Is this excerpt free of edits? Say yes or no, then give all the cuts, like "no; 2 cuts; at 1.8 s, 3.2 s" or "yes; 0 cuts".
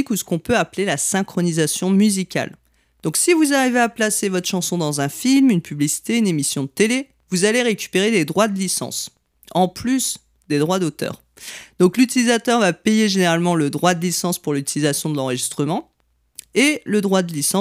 yes; 0 cuts